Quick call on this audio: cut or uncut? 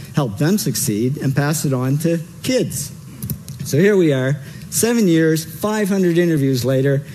uncut